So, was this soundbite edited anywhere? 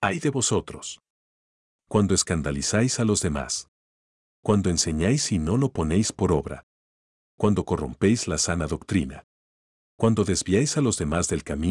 no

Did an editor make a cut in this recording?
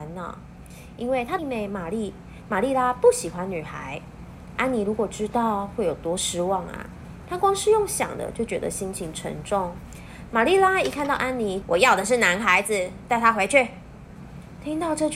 yes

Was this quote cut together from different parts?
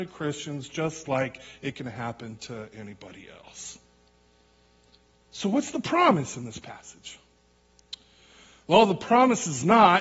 no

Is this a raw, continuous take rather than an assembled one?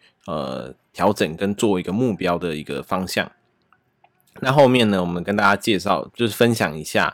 yes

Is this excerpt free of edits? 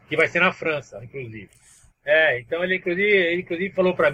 no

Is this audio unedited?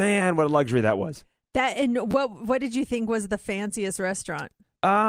yes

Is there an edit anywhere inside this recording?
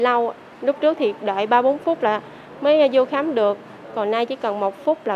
no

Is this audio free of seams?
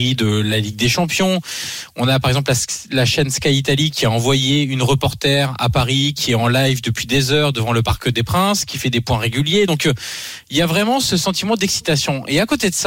yes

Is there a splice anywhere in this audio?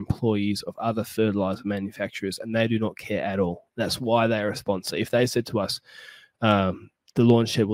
no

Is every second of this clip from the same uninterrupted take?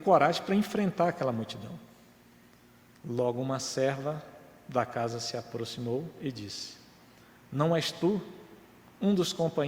no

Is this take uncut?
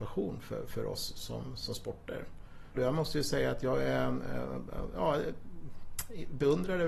no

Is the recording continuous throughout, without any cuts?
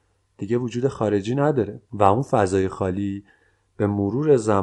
no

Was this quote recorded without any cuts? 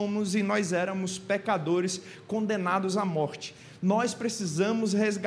yes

